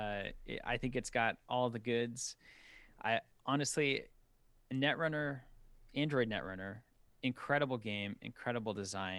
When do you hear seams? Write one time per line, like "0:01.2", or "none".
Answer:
0:07.1